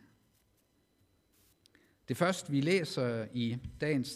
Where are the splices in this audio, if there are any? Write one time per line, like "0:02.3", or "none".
none